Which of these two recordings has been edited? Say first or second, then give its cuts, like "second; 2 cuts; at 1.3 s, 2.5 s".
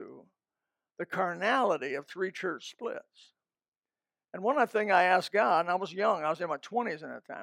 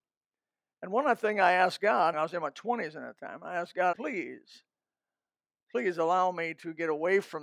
second; 2 cuts; at 2.1 s, 3.9 s